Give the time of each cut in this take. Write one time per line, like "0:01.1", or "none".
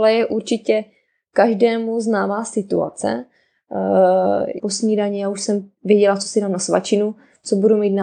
0:04.6